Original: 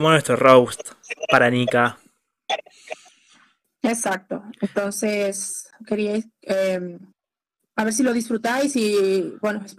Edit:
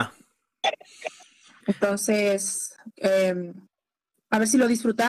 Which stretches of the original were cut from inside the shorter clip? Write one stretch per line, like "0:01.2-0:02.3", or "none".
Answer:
0:03.5-0:04.5
0:05.8-0:06.4

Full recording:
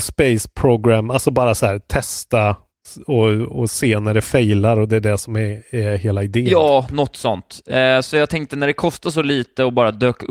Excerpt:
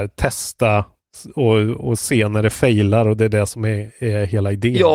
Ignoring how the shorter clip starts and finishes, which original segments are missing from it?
none

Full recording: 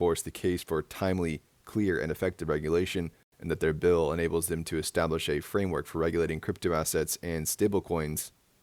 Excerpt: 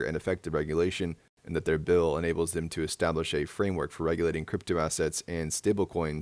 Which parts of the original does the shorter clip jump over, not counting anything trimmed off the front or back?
none

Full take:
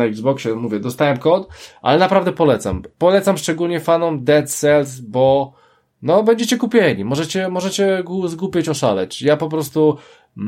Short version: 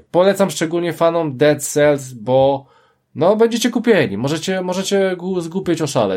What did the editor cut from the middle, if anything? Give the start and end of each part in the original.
none

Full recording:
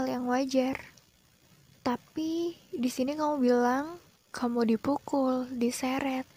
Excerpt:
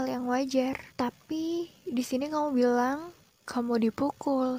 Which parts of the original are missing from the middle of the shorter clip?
0:00.9-0:01.8

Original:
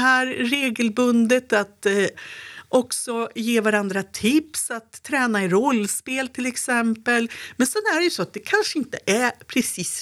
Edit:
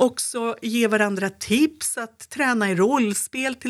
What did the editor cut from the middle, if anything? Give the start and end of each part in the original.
none

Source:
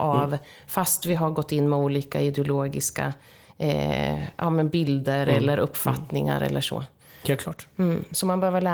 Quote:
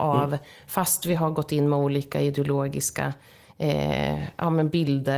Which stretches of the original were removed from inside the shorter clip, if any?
none

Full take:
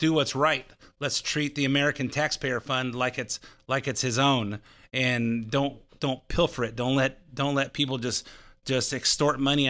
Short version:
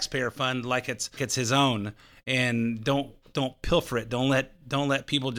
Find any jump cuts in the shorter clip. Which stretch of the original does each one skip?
0:03.5-0:03.8

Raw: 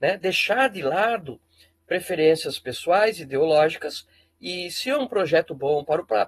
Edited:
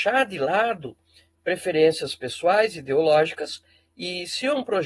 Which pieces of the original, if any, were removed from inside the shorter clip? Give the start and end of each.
none

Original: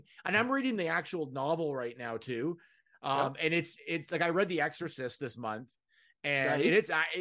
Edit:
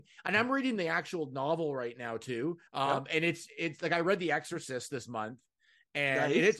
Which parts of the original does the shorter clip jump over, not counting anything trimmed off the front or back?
0:02.7-0:03.0

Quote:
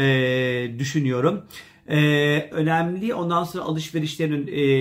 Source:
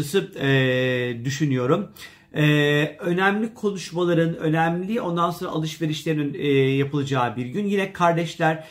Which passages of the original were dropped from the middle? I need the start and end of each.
0:03.0-0:04.4

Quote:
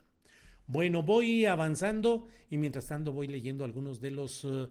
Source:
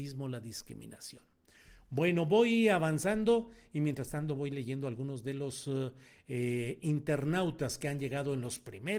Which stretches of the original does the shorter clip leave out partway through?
none

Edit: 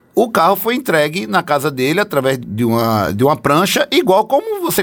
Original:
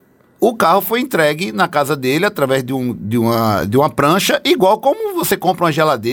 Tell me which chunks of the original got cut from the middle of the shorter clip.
0:02.7-0:02.9

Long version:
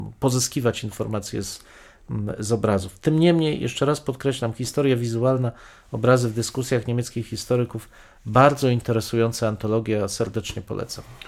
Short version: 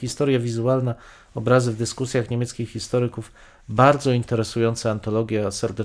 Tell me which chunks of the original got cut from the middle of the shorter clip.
none

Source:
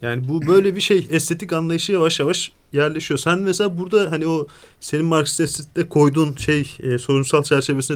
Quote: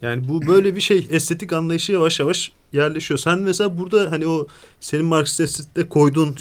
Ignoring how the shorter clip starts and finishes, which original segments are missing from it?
none

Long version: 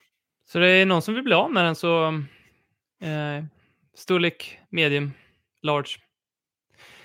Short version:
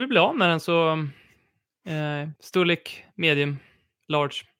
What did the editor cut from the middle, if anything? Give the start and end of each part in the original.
0:03.5-0:03.9

